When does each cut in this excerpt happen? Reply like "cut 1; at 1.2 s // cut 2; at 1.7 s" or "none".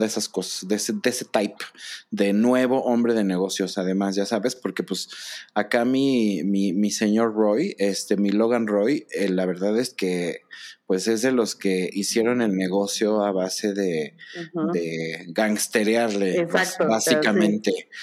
none